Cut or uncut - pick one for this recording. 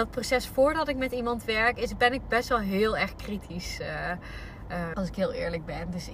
cut